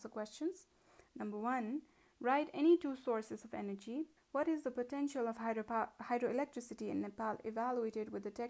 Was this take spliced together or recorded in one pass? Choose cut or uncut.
cut